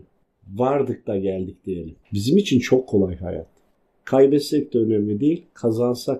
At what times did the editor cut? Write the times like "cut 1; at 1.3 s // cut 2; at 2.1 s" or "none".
cut 1; at 2.0 s